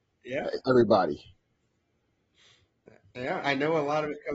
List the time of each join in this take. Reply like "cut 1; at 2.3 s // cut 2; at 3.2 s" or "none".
cut 1; at 3.4 s